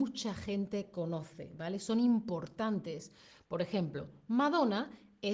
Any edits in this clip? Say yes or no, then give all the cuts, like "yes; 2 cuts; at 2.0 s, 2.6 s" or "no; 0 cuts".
no; 0 cuts